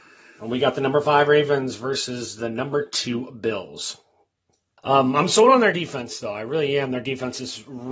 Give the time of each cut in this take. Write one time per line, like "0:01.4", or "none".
0:04.8